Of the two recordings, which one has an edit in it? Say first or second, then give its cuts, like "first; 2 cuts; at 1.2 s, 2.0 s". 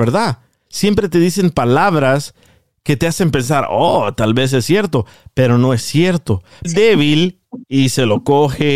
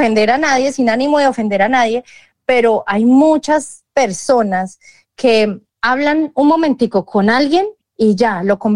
first; 1 cut; at 6.6 s